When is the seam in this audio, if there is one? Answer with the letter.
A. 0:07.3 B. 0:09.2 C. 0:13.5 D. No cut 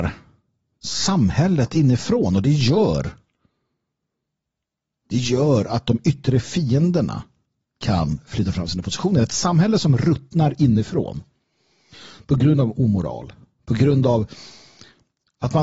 D